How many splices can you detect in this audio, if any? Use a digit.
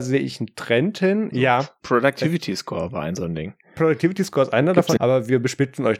2